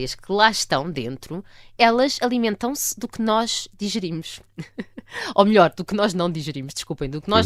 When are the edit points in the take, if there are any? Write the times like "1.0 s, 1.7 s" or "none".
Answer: none